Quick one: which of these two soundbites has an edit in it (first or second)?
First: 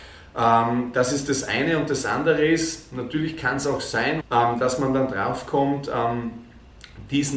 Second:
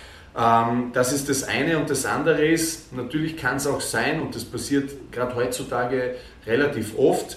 first